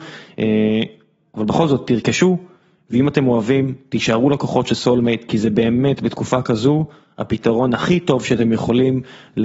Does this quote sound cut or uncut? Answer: uncut